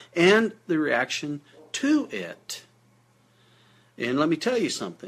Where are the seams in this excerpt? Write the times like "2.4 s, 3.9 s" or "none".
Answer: none